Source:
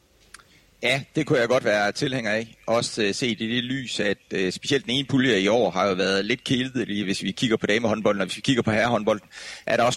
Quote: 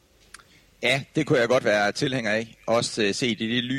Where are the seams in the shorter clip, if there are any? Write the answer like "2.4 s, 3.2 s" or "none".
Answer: none